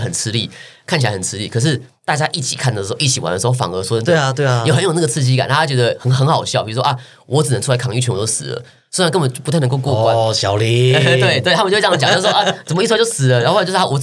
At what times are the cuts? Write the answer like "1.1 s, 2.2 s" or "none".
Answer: none